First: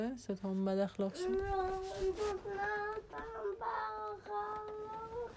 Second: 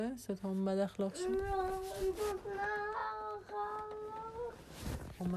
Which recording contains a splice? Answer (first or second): second